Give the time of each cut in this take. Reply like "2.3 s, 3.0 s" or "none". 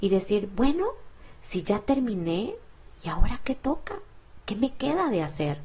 none